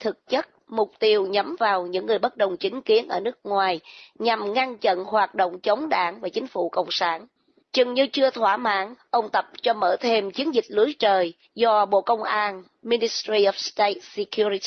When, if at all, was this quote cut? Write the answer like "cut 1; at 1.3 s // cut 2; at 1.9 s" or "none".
cut 1; at 7.6 s // cut 2; at 9.0 s